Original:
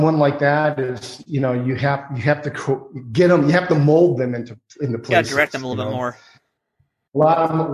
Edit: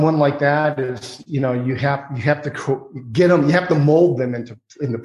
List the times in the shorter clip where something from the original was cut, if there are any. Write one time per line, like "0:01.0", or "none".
none